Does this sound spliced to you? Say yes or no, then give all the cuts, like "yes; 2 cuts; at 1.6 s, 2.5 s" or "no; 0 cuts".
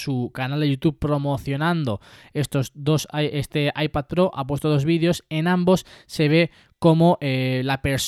no; 0 cuts